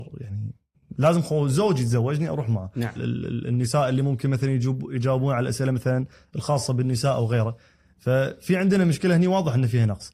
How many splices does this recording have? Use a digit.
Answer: 1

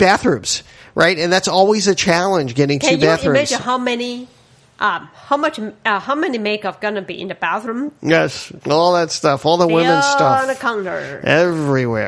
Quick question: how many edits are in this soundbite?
1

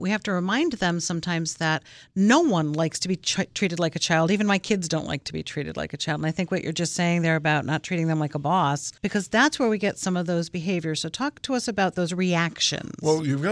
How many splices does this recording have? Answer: 1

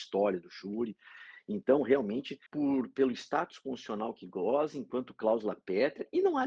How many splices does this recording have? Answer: 1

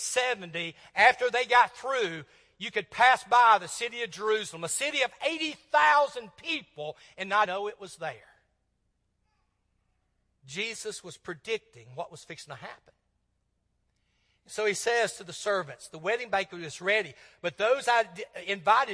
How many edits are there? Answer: 1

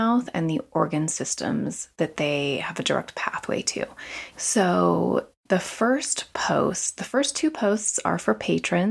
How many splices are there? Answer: 1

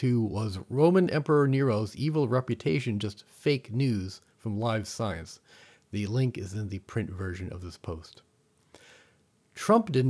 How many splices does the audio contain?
0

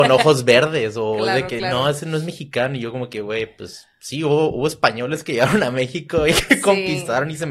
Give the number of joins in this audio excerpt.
0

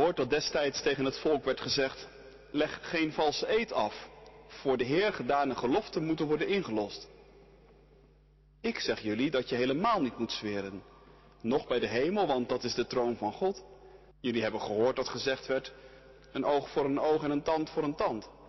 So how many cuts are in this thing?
1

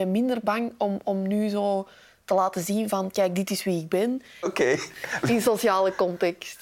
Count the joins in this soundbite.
1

